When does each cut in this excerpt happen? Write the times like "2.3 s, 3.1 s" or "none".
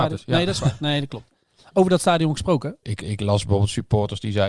2.8 s